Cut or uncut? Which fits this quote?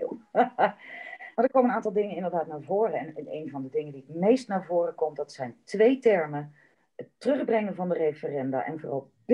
uncut